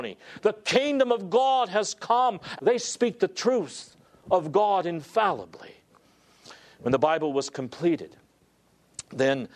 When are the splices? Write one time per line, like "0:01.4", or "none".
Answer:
0:02.6